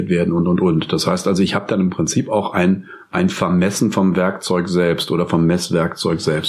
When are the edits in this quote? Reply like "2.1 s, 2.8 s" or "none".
none